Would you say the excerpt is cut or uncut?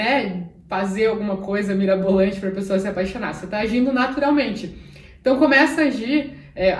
uncut